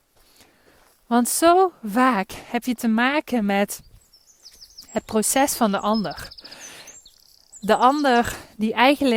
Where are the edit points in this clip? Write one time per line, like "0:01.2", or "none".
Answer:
none